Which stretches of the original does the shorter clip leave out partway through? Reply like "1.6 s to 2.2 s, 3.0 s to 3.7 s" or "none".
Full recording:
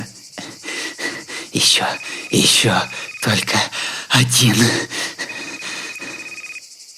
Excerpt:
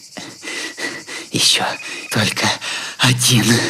2.3 s to 3.2 s